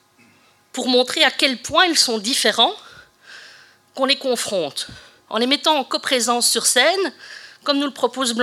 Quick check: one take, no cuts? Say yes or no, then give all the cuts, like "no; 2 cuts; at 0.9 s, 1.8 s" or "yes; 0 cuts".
yes; 0 cuts